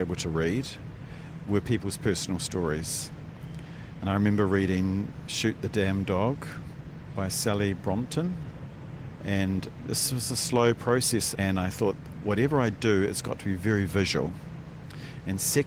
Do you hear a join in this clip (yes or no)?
yes